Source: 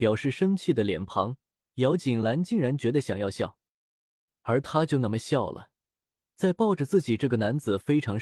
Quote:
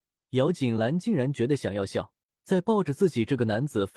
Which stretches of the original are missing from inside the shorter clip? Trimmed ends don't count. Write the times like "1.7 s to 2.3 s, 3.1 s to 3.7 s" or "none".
3.7 s to 6.2 s